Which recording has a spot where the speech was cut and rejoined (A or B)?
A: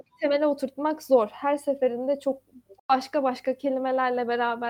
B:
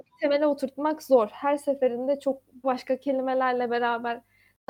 B